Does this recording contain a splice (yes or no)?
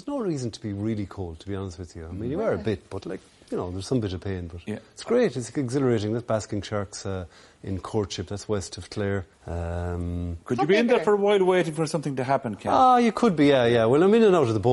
yes